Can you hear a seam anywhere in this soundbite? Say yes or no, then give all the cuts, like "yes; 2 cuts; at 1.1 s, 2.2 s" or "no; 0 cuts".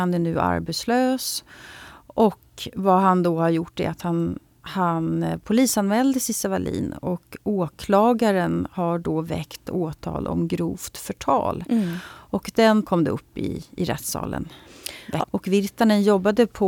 yes; 2 cuts; at 12.8 s, 15.2 s